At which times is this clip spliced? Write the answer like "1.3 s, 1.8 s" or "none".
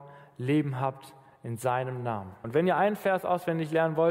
2.4 s